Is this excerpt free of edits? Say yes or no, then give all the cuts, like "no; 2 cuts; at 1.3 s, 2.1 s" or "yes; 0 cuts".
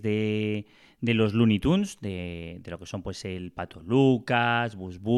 yes; 0 cuts